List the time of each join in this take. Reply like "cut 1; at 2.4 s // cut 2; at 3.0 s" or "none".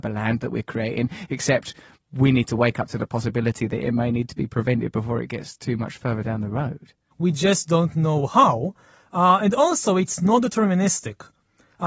cut 1; at 7.1 s